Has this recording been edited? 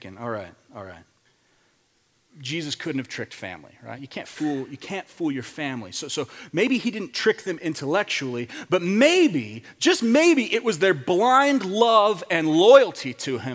no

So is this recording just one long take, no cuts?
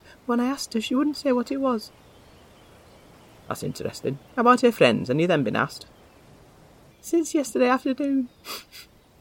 no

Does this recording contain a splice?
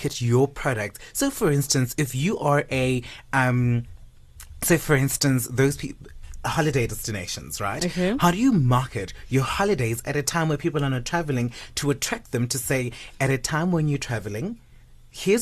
no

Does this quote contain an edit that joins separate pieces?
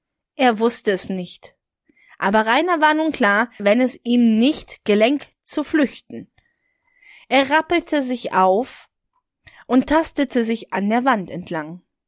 yes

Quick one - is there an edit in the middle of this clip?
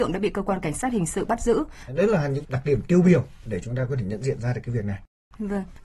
yes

